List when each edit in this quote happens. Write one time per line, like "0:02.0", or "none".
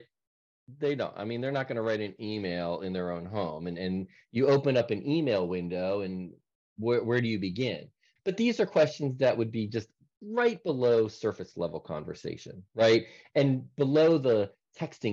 0:08.2